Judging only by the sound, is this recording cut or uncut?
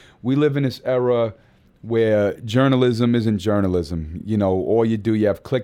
uncut